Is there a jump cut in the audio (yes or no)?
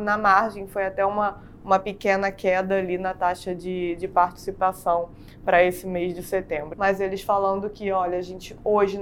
yes